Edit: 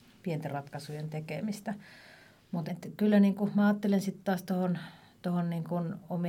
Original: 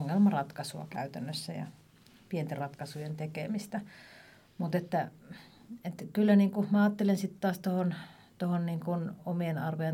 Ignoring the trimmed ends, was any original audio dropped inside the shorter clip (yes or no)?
yes